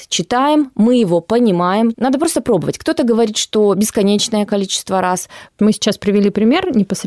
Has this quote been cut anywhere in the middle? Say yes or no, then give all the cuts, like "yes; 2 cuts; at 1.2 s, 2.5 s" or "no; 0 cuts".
yes; 1 cut; at 1.9 s